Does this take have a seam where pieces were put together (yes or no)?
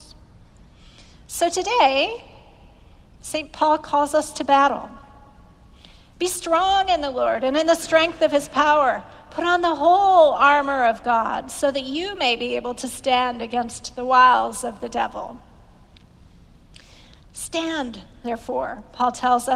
yes